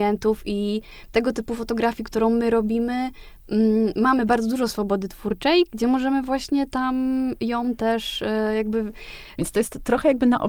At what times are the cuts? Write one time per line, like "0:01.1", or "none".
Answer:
0:09.3